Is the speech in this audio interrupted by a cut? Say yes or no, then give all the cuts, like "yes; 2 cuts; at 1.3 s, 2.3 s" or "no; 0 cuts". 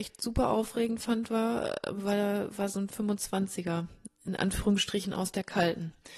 no; 0 cuts